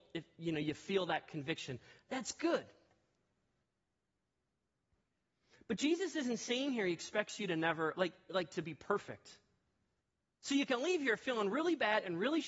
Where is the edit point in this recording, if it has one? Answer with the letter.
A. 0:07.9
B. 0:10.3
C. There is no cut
B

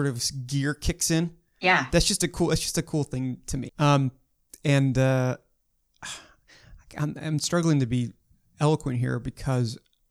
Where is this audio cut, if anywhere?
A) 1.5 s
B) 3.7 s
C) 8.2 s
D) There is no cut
B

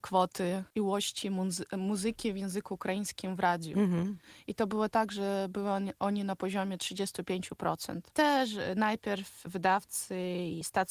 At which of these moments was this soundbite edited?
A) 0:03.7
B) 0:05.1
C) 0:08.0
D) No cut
D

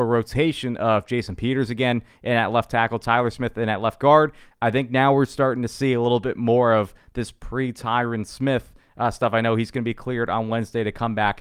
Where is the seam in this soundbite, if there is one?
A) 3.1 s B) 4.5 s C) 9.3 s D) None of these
B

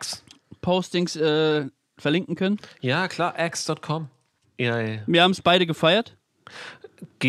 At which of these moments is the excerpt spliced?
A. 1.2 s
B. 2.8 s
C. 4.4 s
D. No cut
C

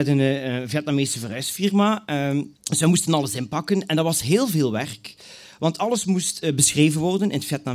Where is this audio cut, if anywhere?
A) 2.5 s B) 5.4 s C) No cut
A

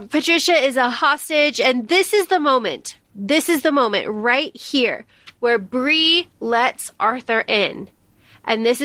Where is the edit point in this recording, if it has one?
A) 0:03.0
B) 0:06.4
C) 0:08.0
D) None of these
A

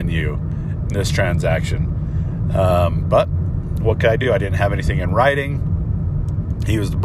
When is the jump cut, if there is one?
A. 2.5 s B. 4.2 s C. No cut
C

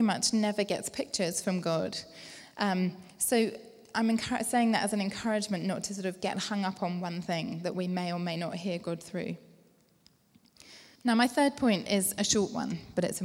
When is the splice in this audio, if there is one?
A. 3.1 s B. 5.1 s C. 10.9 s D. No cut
C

